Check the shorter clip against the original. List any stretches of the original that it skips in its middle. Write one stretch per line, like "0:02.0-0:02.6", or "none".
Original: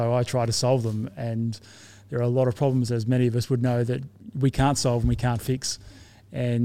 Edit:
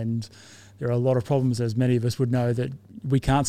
none